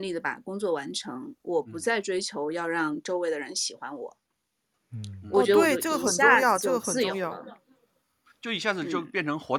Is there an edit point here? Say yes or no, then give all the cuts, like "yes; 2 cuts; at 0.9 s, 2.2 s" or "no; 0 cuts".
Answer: no; 0 cuts